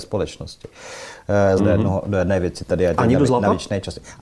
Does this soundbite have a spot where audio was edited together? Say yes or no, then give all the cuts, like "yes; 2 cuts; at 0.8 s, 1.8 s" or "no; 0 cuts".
yes; 1 cut; at 1.6 s